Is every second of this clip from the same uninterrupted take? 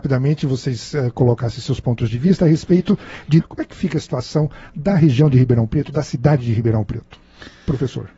no; 1 cut; at 3.4 s

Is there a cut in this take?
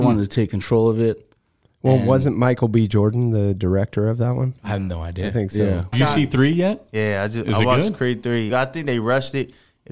yes; 2 cuts; at 5.9 s, 8.5 s

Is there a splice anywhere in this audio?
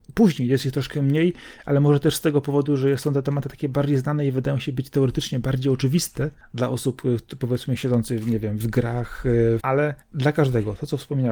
yes; 2 cuts; at 8.6 s, 9.6 s

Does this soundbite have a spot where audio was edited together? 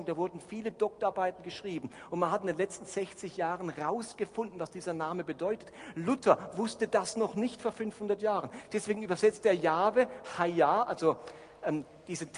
no; 0 cuts

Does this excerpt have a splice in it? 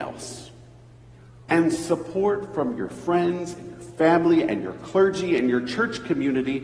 yes; 1 cut; at 1.5 s

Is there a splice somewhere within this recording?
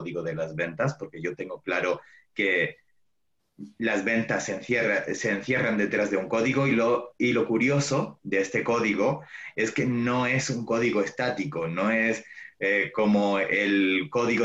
no; 0 cuts

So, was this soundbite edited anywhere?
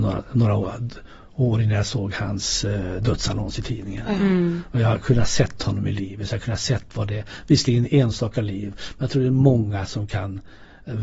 no; 0 cuts

